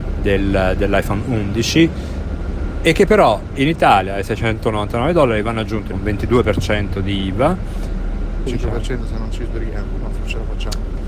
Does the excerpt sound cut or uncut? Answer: cut